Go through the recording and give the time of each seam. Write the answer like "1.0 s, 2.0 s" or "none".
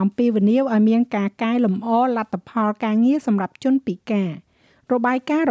none